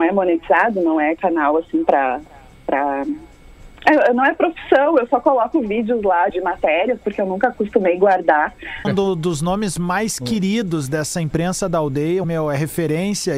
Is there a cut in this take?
yes; 3 cuts; at 6.3 s, 8.8 s, 12.2 s

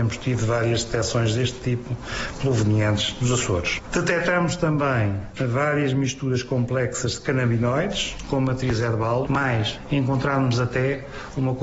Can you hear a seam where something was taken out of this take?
yes; 1 cut; at 9.3 s

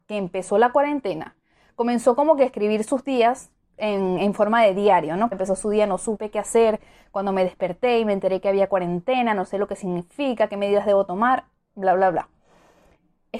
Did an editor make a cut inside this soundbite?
yes; 1 cut; at 5.3 s

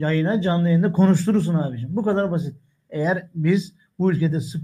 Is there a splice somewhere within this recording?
yes; 1 cut; at 2.8 s

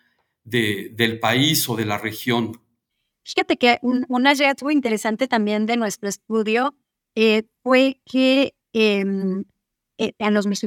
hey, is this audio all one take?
yes; 0 cuts

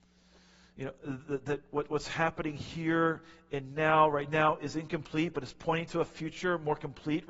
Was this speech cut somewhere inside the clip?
no; 0 cuts

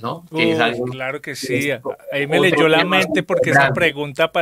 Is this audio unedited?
yes; 0 cuts

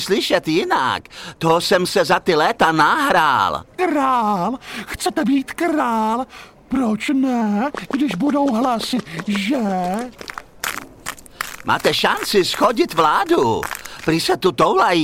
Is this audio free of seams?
yes; 0 cuts

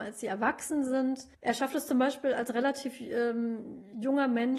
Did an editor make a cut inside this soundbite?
yes; 1 cut; at 1.4 s

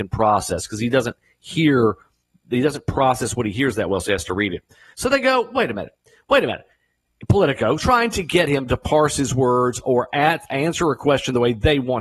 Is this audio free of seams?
no; 2 cuts; at 4.9 s, 7.8 s

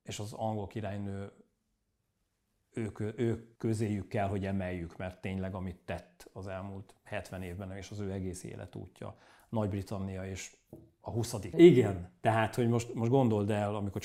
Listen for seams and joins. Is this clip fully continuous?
no; 2 cuts; at 3.5 s, 11.5 s

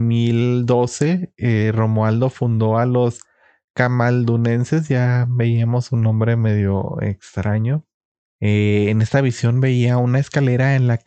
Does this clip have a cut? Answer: yes; 1 cut; at 8.2 s

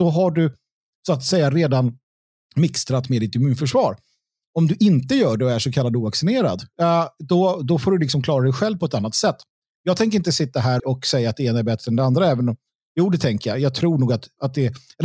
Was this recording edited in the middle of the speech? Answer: yes; 1 cut; at 10.8 s

